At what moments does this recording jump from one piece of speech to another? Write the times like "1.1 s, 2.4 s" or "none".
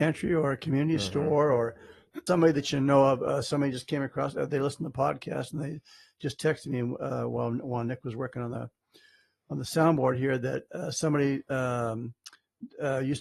2.3 s